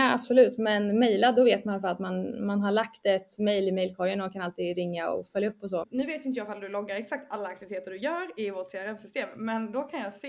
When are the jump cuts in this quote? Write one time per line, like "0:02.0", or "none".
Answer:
0:05.8

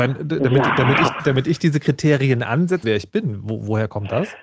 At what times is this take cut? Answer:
0:01.2
0:02.8

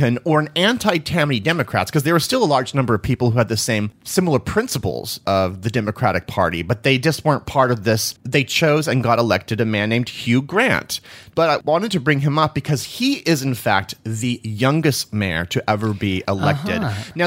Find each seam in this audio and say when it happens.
0:08.2

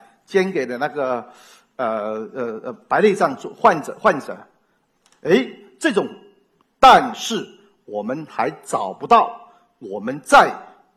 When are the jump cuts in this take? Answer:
0:06.6

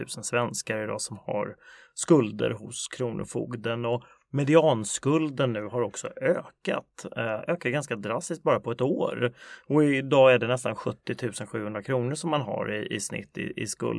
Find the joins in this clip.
none

